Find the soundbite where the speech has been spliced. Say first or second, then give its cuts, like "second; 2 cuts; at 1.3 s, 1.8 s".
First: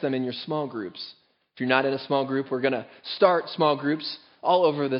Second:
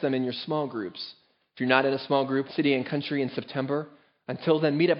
second; 1 cut; at 2.5 s